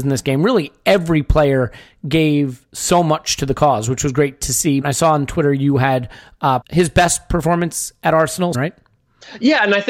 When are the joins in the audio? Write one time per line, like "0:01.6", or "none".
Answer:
0:04.8
0:06.6
0:08.5